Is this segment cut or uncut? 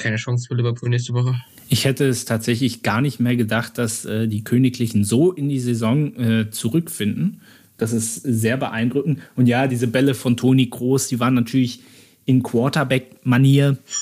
uncut